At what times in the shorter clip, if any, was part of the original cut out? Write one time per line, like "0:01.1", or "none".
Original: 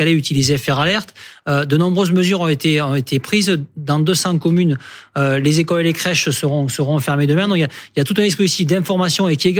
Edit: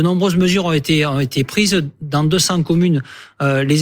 none